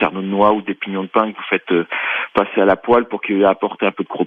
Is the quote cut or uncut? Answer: uncut